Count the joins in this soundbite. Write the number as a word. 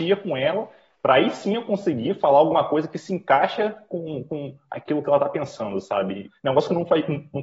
one